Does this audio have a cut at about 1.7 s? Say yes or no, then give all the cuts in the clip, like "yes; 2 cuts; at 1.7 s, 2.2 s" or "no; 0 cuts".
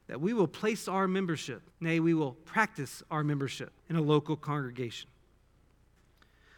yes; 2 cuts; at 1.7 s, 3.8 s